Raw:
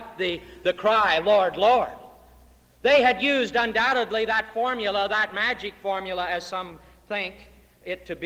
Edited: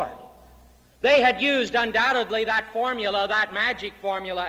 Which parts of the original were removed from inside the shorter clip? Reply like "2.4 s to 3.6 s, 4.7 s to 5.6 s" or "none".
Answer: none